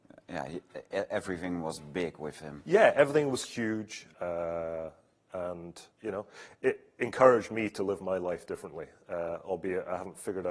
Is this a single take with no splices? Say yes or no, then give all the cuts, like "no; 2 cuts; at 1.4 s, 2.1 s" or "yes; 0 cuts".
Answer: no; 2 cuts; at 4.1 s, 5.9 s